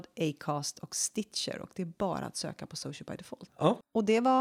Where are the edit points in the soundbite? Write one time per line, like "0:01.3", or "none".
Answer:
0:03.5